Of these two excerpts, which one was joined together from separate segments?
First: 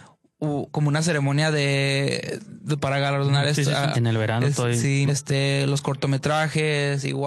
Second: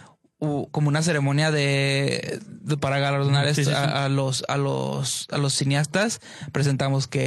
first; 2 cuts; at 3.9 s, 5.1 s

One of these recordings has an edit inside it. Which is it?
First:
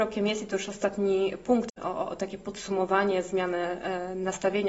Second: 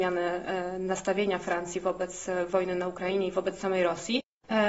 first; 1 cut; at 1.7 s

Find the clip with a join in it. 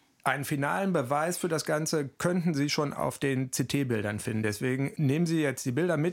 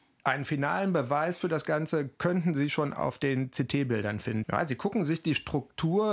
second; 1 cut; at 4.4 s

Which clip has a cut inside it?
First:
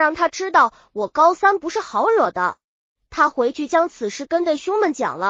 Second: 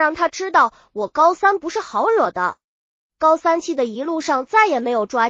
first; 1 cut; at 3.0 s

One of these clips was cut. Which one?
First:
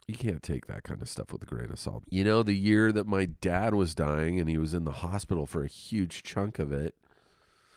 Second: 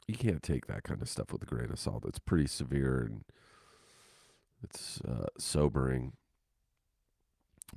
first; 1 cut; at 2.0 s

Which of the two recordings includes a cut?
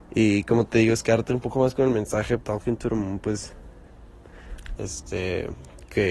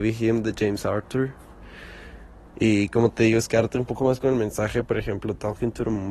first; 2 cuts; at 2.4 s, 4.8 s

